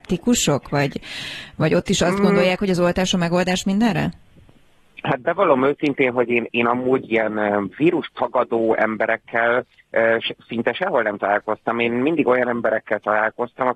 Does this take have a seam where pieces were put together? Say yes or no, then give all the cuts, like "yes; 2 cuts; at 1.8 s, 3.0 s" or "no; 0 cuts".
no; 0 cuts